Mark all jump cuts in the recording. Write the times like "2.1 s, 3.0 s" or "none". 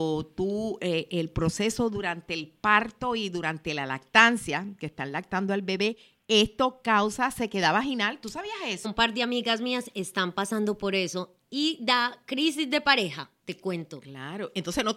8.8 s

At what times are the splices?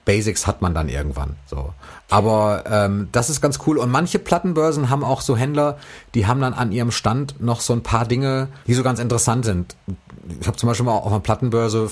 8.6 s

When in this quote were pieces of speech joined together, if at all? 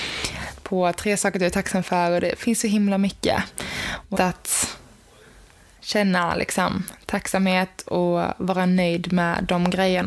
4.1 s

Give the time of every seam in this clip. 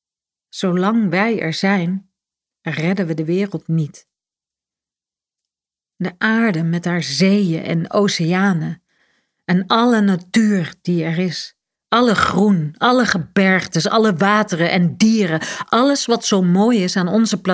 none

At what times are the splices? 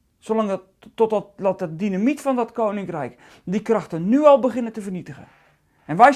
1.4 s

